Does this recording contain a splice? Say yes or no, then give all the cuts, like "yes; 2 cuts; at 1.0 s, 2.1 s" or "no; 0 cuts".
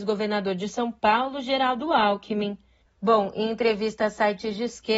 yes; 1 cut; at 2.9 s